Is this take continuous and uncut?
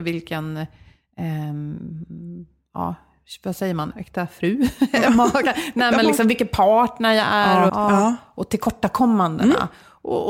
no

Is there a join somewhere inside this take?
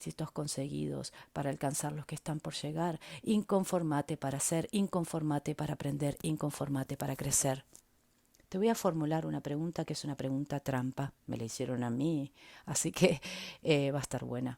no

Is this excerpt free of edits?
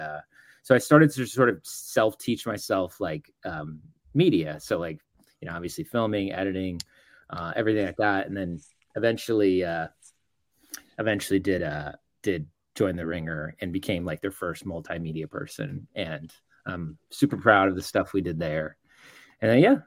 yes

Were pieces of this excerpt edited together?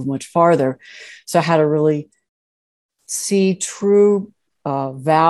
no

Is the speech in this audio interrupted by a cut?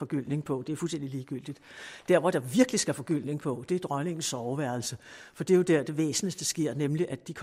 no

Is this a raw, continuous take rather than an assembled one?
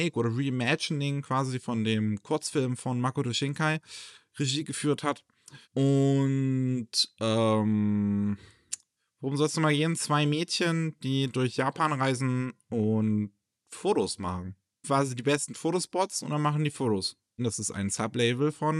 no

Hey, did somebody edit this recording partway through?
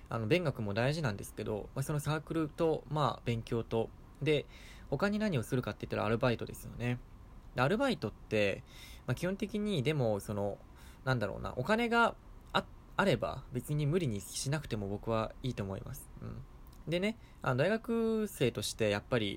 yes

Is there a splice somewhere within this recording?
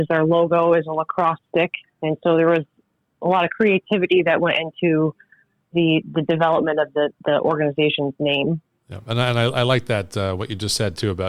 yes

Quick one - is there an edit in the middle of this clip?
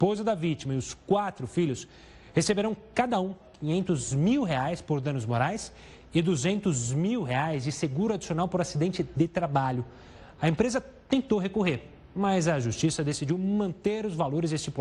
no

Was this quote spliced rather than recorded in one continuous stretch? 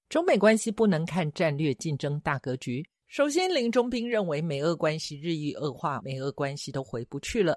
yes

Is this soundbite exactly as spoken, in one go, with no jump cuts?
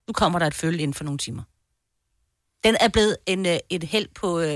yes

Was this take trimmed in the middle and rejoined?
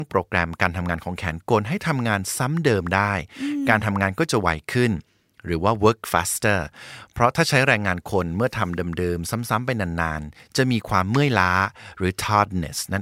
no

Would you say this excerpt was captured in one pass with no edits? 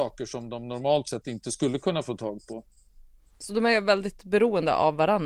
yes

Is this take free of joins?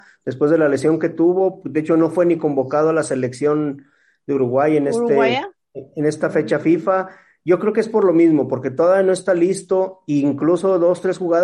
yes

